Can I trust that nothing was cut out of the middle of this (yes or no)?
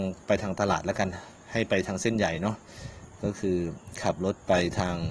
yes